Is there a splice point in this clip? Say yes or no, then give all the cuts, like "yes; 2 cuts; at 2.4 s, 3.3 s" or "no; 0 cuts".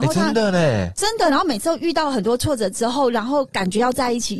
no; 0 cuts